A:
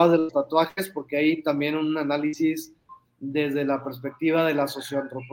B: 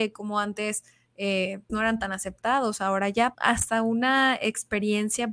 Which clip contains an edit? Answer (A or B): B